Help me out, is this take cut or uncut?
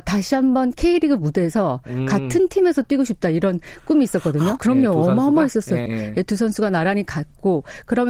cut